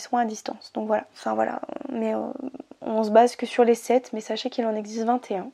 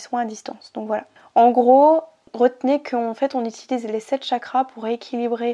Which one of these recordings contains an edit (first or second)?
first